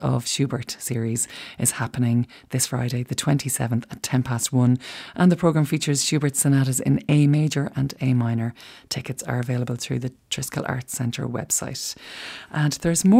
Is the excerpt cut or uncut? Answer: uncut